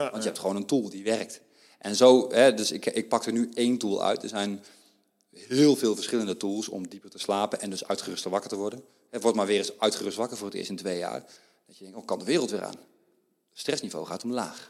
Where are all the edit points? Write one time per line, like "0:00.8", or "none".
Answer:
none